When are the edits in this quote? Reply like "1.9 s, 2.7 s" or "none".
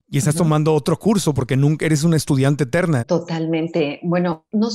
3.0 s